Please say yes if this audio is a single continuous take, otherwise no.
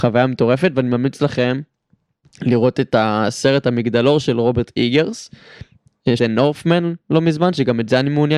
no